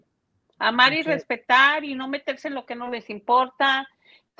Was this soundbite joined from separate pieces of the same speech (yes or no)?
no